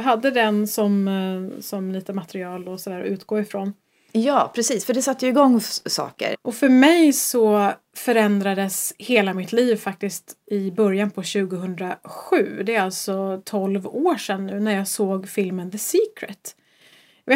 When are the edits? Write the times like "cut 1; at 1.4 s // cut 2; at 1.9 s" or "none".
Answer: cut 1; at 6.3 s